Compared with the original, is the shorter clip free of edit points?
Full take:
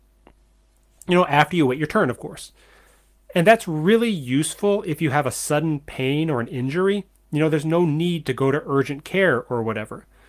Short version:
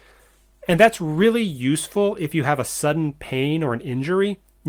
yes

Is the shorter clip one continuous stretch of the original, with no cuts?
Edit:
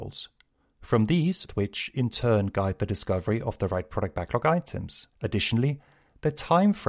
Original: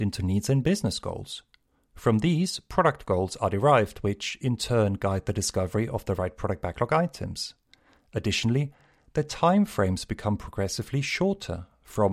no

